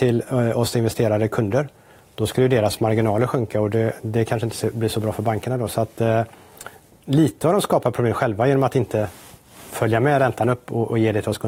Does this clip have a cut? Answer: no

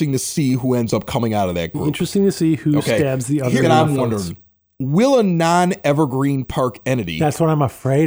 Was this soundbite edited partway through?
yes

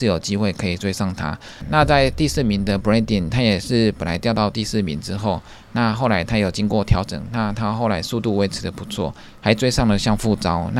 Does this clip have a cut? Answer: no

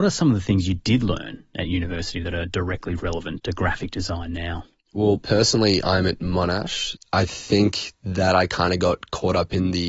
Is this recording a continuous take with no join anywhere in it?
no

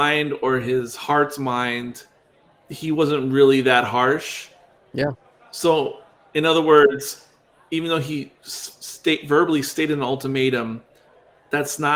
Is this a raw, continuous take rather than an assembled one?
yes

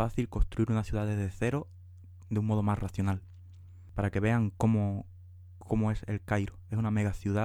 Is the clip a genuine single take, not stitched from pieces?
yes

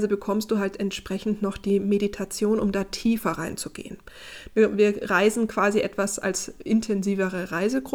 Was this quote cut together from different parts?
yes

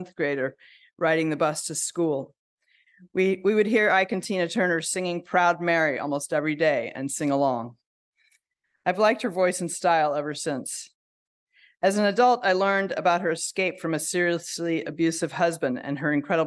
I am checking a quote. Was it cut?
no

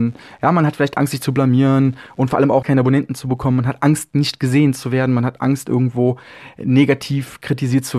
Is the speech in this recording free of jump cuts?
no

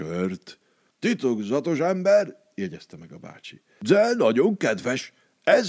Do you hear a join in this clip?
yes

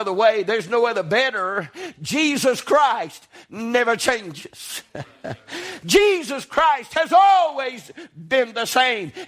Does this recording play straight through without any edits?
no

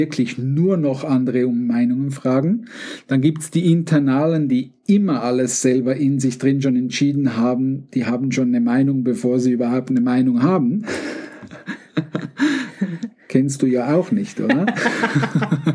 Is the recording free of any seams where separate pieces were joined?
yes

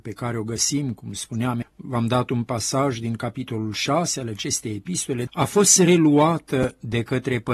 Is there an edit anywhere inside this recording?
yes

